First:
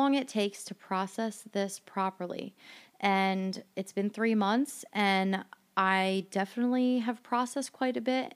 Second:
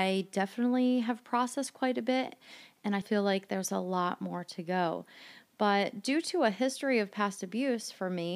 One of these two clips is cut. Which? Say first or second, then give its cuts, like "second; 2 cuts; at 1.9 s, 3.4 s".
second; 1 cut; at 3.0 s